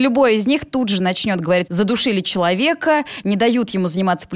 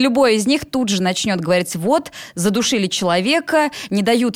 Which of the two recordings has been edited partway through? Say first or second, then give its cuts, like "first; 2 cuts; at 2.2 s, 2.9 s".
first; 1 cut; at 1.7 s